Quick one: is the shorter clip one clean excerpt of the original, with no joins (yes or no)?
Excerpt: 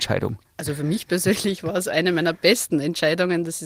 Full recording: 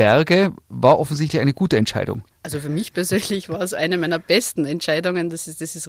yes